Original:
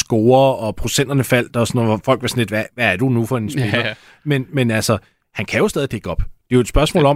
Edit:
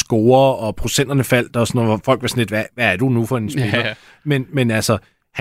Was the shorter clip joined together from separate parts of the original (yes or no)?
no